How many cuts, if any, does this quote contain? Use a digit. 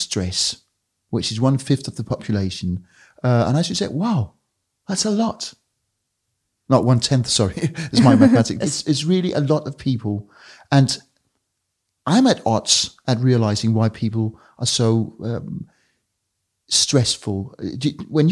1